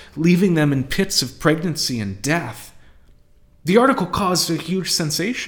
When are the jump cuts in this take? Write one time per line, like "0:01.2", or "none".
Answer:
none